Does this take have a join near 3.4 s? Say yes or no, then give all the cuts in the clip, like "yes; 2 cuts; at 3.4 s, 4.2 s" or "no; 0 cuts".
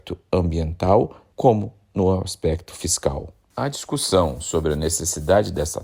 no; 0 cuts